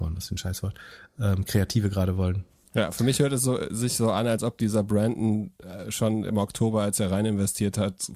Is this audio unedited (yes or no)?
yes